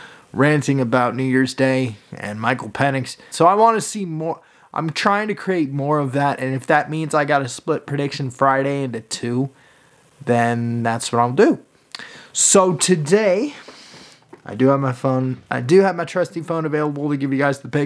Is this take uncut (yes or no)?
no